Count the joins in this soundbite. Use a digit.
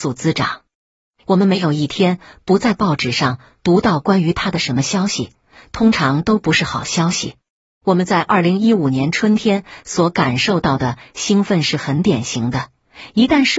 2